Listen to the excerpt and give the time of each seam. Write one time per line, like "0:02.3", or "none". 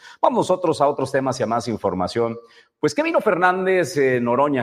none